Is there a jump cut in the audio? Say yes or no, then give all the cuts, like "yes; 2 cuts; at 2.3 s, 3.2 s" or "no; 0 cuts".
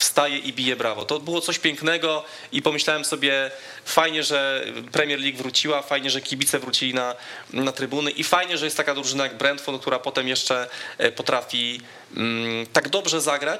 no; 0 cuts